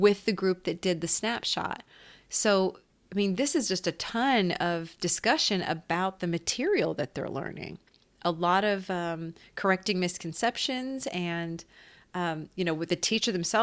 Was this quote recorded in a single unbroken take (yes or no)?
yes